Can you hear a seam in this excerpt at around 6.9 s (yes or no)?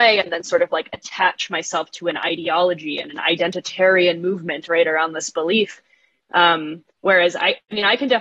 yes